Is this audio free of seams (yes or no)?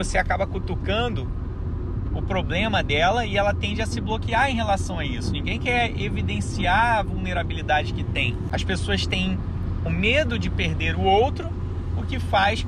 no